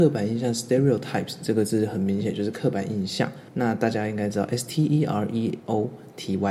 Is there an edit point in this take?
yes; 1 cut; at 3.5 s

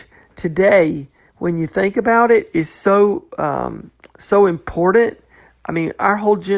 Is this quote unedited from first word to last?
yes; 0 cuts

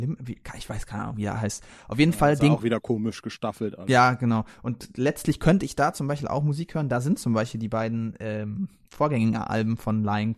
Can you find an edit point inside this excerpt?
no; 0 cuts

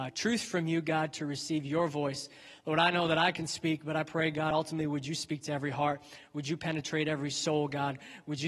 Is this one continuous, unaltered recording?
yes; 0 cuts

